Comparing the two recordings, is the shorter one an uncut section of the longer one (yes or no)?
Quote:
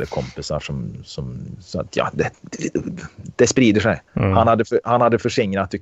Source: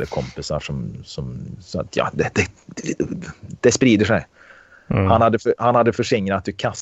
no